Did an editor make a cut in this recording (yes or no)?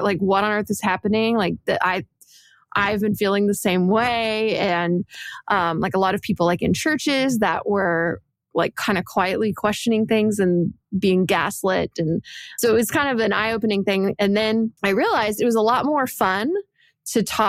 yes